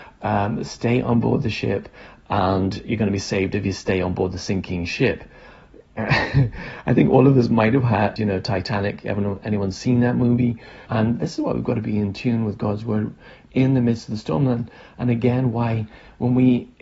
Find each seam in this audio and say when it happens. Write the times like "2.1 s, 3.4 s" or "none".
8.2 s, 10.9 s

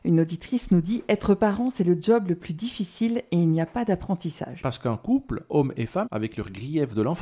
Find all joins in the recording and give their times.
4.6 s, 6.0 s

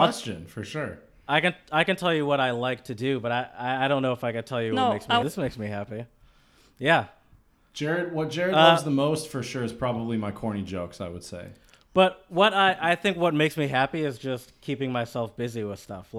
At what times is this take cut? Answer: 5.2 s

